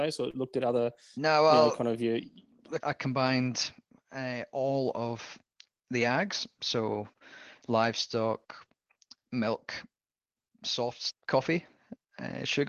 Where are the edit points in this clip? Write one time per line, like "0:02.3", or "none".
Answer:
0:02.8
0:11.1